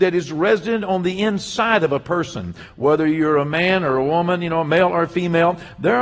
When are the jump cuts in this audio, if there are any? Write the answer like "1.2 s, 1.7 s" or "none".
none